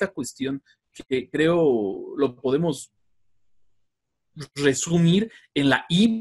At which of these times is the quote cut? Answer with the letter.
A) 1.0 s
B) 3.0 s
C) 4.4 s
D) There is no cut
D